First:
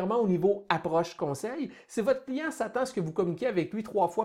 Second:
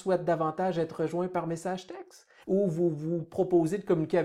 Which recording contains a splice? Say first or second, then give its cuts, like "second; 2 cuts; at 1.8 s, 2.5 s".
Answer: second; 1 cut; at 2.4 s